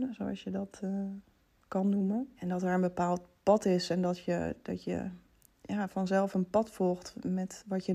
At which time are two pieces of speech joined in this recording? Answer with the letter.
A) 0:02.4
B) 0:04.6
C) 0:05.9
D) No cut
A